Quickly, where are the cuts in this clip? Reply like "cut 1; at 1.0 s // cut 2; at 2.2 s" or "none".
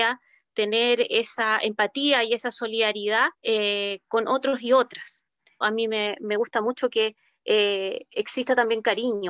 cut 1; at 3.3 s // cut 2; at 5.6 s